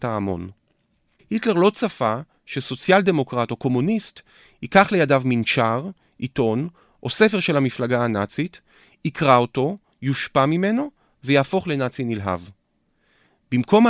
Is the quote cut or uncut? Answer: cut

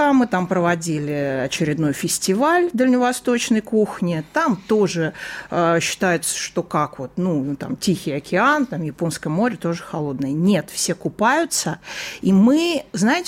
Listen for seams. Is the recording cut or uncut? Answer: uncut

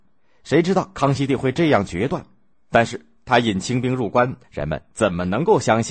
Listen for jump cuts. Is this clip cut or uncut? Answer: cut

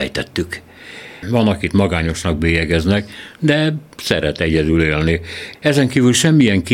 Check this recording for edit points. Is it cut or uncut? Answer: cut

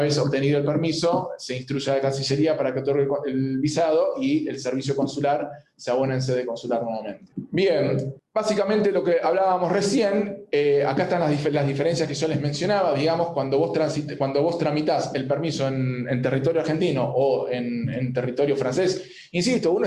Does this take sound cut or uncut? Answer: uncut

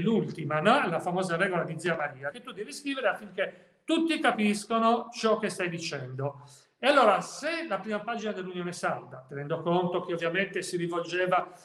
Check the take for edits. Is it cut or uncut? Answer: cut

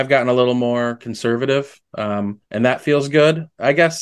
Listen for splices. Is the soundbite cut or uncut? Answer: cut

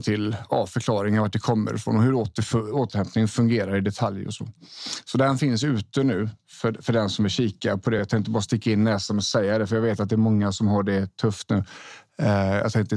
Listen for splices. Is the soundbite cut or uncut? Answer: uncut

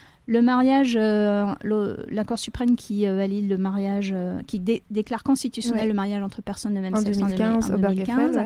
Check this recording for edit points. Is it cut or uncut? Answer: uncut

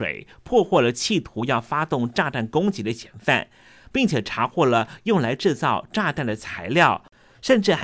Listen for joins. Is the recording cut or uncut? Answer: uncut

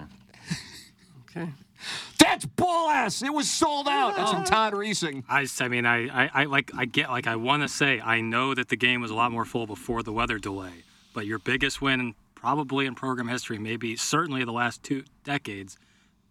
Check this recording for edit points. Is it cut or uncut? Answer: uncut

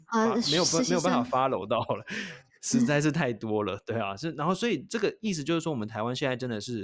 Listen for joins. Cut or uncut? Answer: uncut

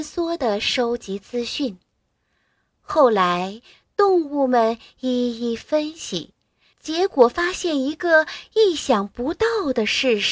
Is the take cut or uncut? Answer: uncut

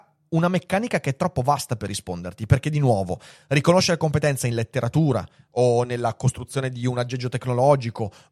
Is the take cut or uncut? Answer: uncut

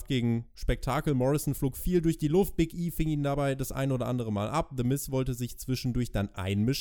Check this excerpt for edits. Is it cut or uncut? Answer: uncut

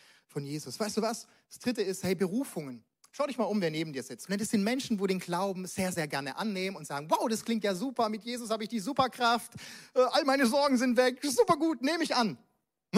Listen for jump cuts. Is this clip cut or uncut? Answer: cut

